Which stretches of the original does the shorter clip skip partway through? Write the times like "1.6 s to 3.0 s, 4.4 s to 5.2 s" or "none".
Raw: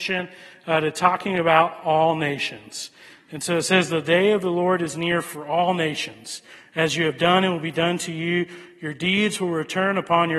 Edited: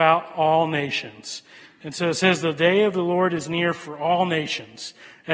none